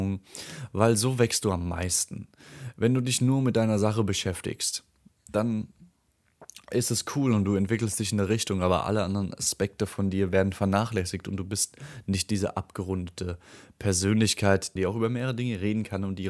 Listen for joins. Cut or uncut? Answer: cut